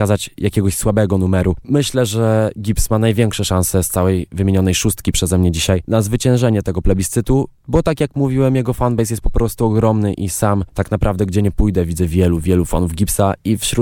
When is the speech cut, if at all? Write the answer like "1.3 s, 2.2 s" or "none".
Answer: 1.6 s